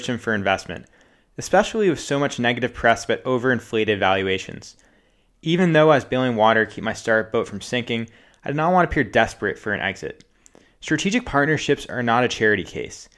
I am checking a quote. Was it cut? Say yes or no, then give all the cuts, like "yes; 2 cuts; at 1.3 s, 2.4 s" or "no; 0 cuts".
no; 0 cuts